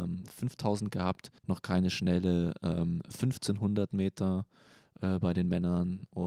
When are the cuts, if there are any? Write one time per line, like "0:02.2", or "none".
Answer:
0:01.4